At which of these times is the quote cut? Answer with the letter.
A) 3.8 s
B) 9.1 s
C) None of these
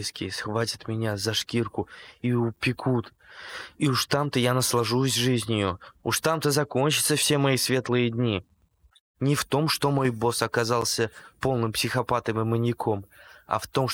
B